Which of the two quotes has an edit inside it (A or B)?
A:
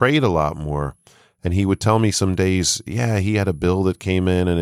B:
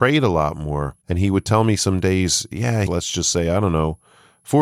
B